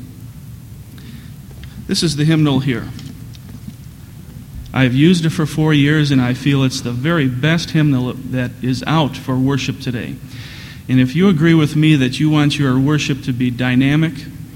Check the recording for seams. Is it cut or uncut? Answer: uncut